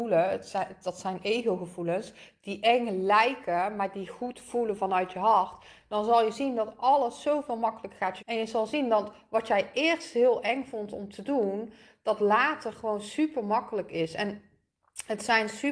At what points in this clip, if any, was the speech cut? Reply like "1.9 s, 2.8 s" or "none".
8.2 s